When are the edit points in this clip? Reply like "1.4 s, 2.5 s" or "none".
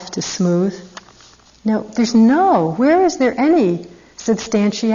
none